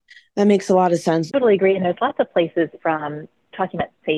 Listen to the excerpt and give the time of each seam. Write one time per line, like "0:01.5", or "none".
0:01.3
0:02.8